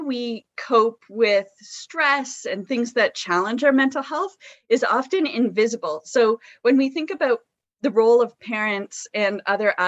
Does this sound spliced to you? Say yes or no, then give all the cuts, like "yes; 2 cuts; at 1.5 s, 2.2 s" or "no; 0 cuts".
no; 0 cuts